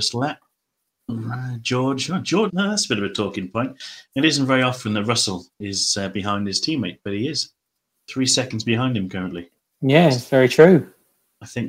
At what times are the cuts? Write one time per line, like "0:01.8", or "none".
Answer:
0:02.5